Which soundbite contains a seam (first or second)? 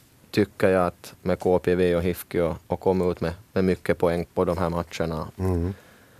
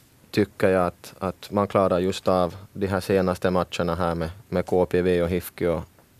first